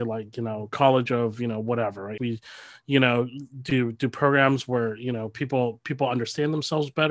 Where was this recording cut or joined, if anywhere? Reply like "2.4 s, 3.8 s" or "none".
2.2 s

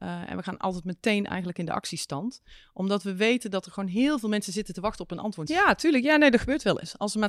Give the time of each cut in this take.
5.5 s

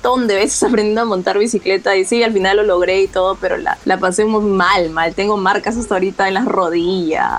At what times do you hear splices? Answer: none

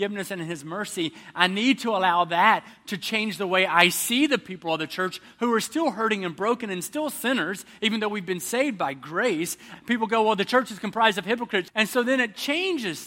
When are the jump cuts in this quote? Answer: 9.8 s, 11.7 s

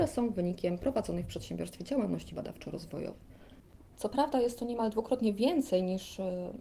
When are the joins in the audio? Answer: 3.9 s

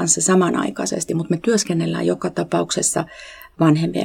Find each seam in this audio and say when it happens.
none

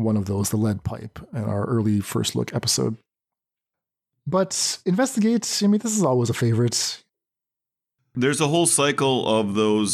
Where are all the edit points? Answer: none

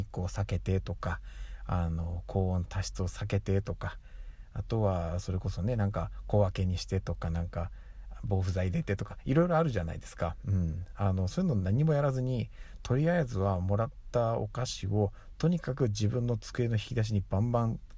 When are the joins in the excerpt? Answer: none

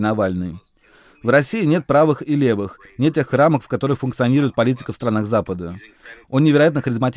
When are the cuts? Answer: 6.2 s

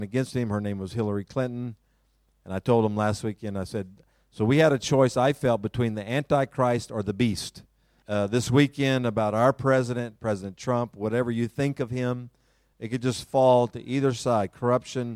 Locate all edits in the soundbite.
8.0 s, 12.7 s

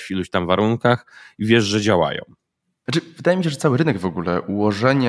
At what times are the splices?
none

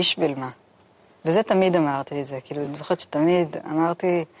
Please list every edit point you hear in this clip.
none

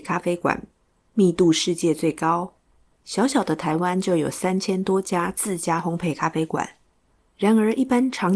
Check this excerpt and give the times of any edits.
none

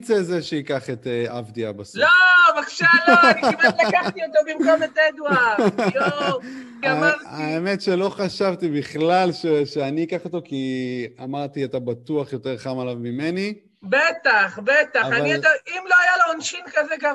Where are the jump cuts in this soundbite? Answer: 6.8 s

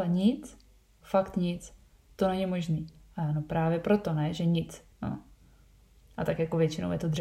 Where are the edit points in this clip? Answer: 1.0 s, 4.9 s

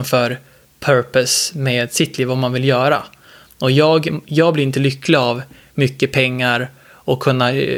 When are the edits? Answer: none

